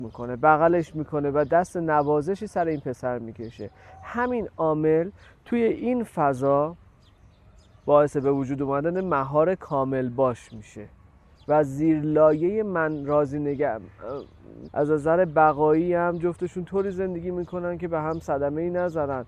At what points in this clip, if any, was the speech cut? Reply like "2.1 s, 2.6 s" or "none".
14.7 s